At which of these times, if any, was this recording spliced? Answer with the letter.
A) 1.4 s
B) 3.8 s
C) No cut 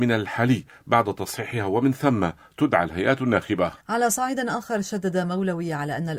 B